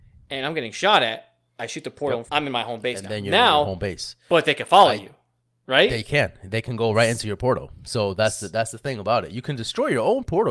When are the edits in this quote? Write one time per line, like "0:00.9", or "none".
0:02.3

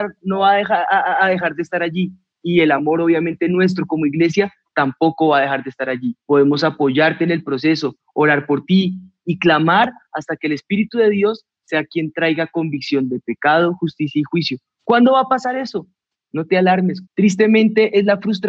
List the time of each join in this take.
0:06.2
0:17.1

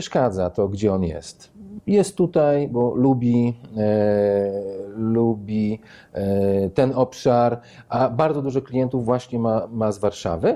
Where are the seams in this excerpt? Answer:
none

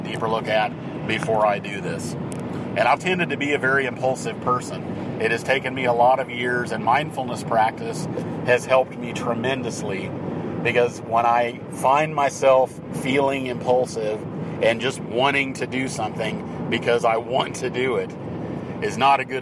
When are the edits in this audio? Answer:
0:03.0

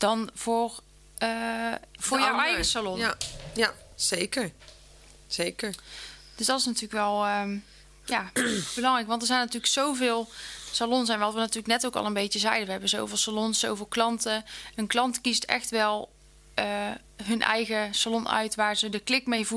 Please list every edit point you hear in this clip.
0:02.0

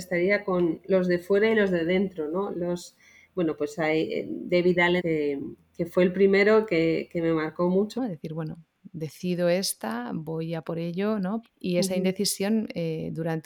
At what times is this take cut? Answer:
0:05.0
0:08.0
0:11.4

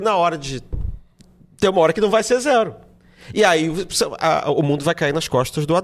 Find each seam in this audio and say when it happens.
none

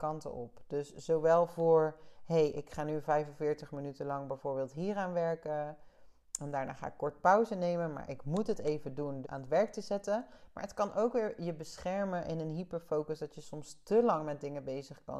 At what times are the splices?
0:09.2

